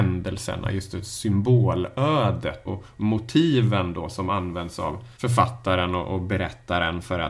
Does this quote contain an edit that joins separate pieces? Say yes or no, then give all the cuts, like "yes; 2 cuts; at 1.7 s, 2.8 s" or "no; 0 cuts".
yes; 2 cuts; at 2.7 s, 5.1 s